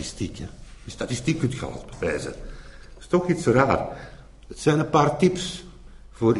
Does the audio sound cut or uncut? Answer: uncut